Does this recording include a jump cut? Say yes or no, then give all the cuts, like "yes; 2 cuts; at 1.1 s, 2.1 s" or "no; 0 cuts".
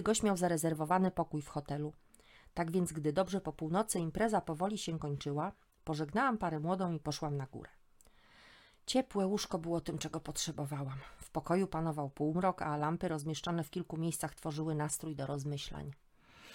no; 0 cuts